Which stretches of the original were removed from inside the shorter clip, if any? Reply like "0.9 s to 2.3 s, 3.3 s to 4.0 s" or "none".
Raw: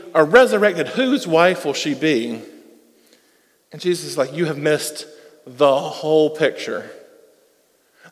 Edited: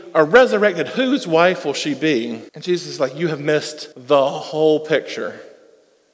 2.5 s to 3.7 s, 5.1 s to 5.4 s